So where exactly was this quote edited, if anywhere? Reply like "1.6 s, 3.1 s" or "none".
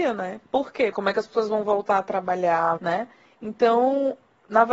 0.9 s, 2.8 s